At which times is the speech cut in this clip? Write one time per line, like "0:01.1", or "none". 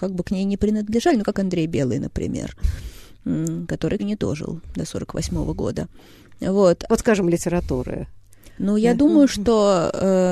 0:04.0
0:06.9